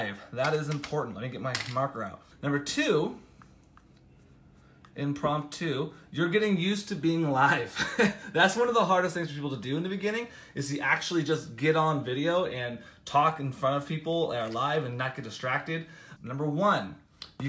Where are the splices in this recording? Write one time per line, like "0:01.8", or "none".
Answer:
0:02.3
0:16.2